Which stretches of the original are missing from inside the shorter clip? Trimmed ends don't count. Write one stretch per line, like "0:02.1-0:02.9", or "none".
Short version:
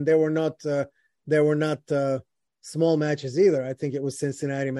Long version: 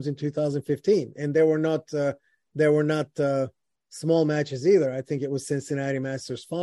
none